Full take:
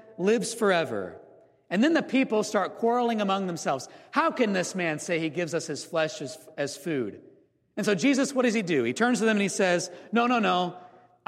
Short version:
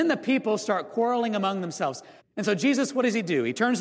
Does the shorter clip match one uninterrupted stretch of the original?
no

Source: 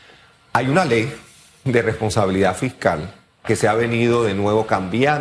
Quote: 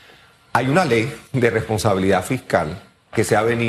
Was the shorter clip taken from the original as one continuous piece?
no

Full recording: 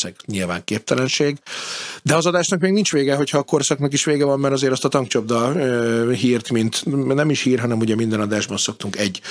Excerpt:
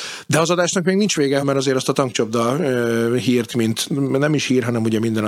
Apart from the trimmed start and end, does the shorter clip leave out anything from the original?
yes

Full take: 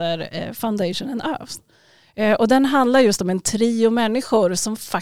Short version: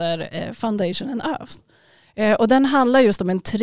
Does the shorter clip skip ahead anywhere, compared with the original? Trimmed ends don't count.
no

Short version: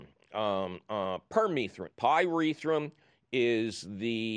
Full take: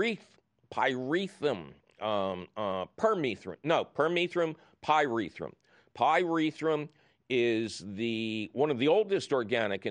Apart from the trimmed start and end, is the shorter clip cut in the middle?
yes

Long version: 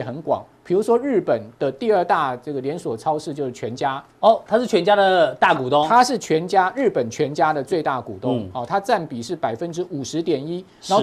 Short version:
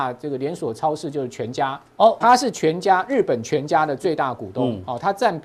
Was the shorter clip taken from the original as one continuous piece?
no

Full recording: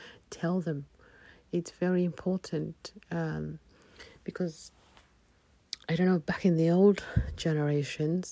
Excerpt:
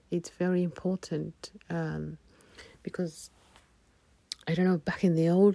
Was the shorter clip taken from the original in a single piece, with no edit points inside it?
yes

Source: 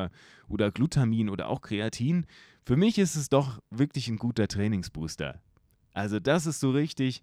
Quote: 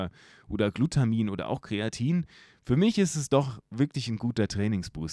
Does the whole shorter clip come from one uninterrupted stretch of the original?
yes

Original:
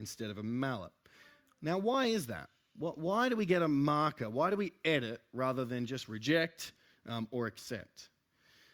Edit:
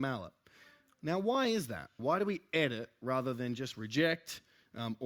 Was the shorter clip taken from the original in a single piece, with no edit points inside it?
no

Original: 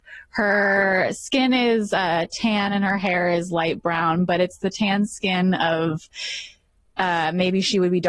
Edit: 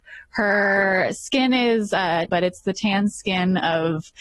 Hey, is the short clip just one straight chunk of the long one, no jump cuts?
no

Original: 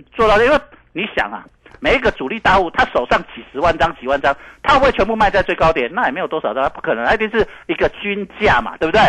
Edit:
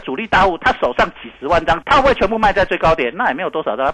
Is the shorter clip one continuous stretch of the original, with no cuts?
no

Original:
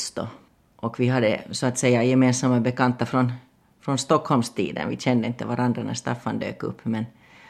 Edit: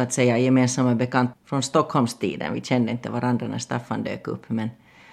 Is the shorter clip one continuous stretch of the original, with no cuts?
no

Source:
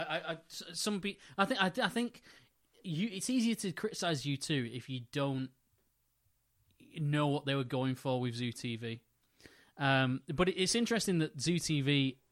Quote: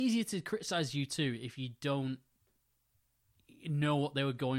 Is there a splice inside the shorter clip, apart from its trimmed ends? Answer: no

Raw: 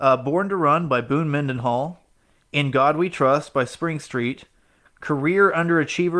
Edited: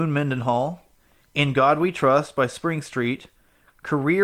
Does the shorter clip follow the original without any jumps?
yes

